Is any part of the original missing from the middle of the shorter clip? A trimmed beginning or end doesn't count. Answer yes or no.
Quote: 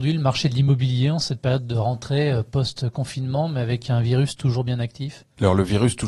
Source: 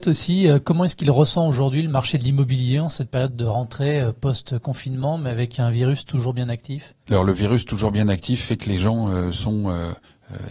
no